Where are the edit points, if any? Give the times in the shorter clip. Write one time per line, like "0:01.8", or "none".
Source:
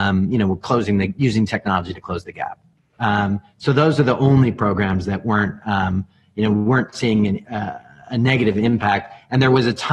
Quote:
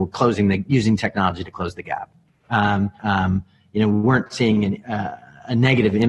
0:03.0